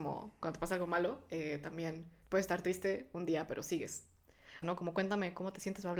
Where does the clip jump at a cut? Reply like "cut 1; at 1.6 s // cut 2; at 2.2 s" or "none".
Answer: cut 1; at 2.2 s // cut 2; at 4.6 s